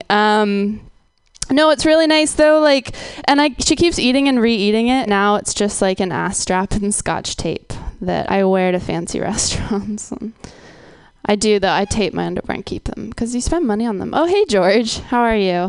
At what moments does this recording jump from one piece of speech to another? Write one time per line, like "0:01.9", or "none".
0:05.1
0:08.3
0:10.4